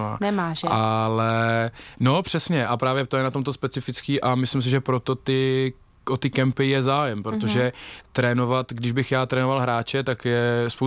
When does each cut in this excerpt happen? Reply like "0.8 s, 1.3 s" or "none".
none